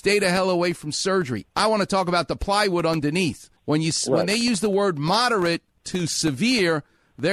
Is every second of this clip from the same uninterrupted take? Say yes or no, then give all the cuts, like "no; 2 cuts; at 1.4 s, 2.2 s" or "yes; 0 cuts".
no; 2 cuts; at 1.5 s, 3.6 s